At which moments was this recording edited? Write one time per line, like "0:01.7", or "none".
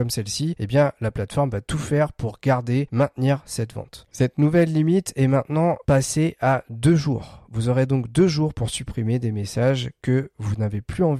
0:04.1